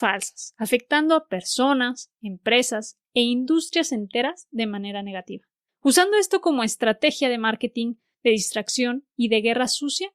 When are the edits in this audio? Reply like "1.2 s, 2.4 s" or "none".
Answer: none